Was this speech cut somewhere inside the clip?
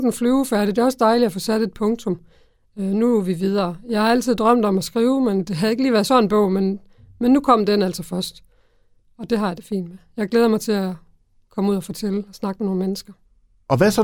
no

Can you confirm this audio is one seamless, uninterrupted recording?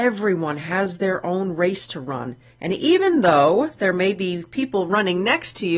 yes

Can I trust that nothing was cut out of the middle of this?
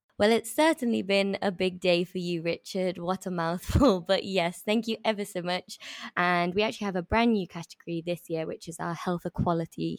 no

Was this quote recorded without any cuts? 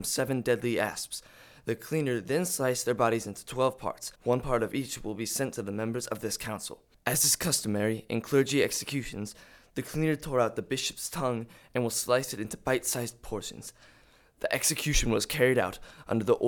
no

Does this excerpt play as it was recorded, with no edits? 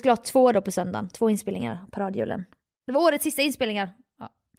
yes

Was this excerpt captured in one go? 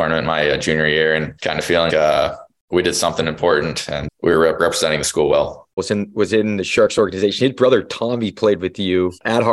no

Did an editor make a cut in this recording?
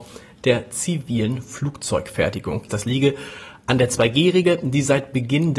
yes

